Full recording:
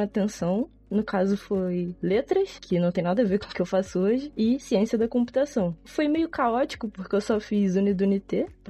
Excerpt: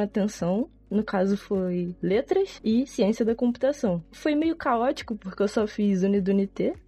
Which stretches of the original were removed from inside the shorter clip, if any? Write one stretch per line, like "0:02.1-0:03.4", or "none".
0:02.6-0:04.3